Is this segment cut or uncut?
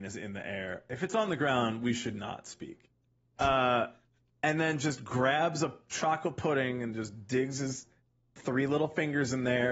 uncut